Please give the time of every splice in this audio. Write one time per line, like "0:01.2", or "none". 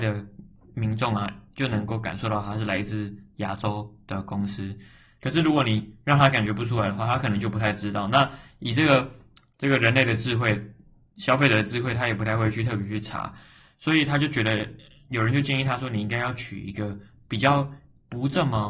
0:05.2